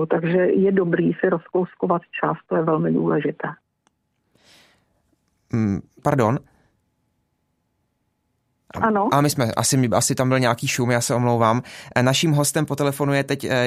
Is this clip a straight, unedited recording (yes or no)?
no